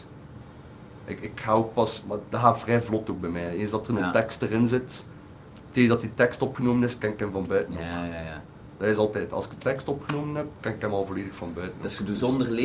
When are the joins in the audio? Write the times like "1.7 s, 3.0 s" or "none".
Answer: none